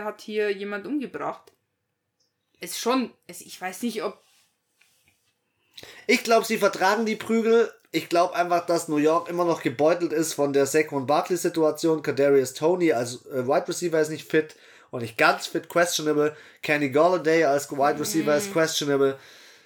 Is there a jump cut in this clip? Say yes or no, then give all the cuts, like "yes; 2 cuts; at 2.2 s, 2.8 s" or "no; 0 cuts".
no; 0 cuts